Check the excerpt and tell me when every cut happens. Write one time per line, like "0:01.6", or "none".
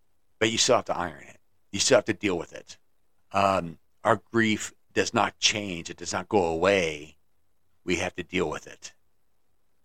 0:03.2